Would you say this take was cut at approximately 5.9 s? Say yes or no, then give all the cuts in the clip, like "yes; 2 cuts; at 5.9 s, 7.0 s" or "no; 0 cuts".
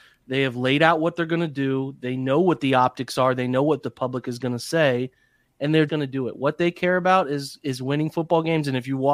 yes; 1 cut; at 5.9 s